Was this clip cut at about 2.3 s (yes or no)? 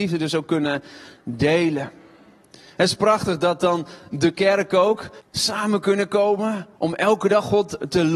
no